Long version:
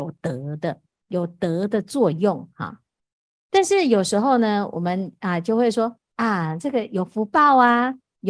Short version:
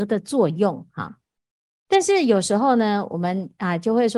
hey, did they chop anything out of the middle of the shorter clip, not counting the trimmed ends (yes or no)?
no